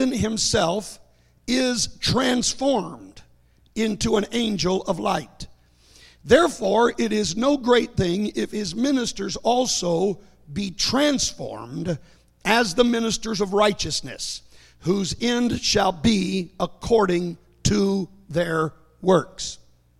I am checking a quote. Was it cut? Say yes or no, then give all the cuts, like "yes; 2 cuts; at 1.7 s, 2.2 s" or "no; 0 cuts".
no; 0 cuts